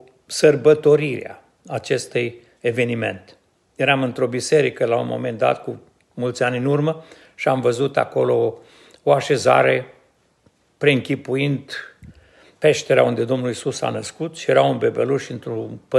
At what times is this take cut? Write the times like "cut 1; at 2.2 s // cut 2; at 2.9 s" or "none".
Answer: none